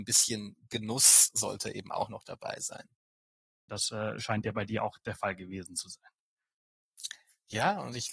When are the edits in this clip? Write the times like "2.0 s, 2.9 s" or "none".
3.7 s